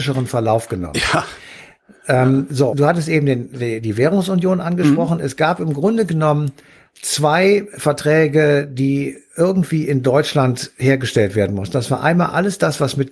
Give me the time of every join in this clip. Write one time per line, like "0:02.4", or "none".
0:02.7

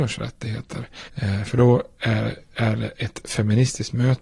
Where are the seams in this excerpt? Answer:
0:01.1

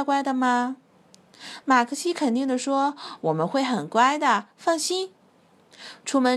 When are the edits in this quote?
none

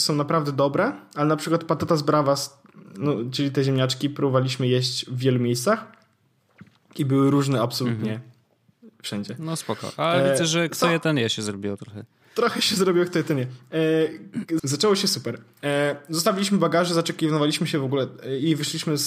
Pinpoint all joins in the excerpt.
0:14.6

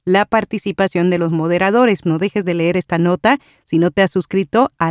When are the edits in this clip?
0:02.0

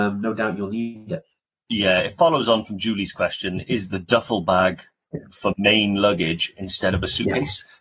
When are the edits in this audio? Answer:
none

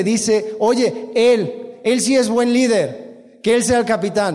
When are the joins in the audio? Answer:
none

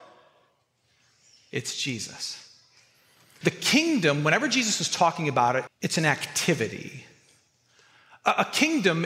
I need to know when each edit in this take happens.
0:03.4
0:05.7

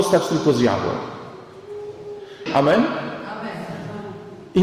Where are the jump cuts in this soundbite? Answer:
0:02.5

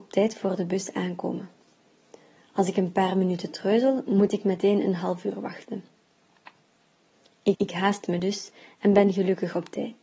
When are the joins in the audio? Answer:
0:07.5

